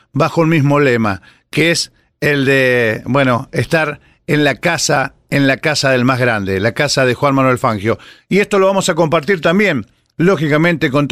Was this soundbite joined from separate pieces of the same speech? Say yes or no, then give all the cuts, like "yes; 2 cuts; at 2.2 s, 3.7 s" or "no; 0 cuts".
no; 0 cuts